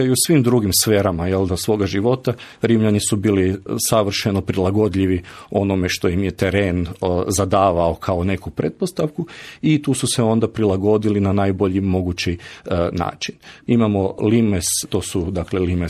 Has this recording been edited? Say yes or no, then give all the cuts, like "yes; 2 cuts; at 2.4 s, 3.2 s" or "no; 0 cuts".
yes; 2 cuts; at 13.7 s, 14.8 s